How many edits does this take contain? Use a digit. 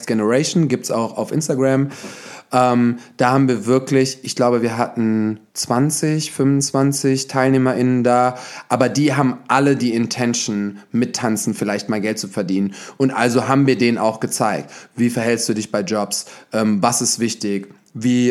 1